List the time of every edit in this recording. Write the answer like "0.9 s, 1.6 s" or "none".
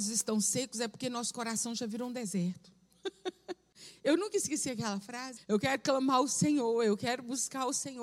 5.4 s